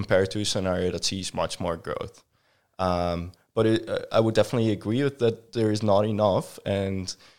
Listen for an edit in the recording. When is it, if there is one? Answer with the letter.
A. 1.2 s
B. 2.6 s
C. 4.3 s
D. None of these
D